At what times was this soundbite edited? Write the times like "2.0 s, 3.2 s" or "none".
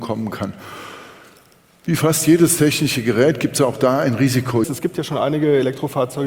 4.6 s